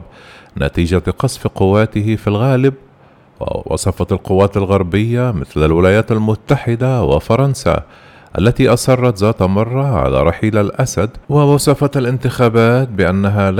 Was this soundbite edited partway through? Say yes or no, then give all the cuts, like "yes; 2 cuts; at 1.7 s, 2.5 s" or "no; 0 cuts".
yes; 1 cut; at 11.2 s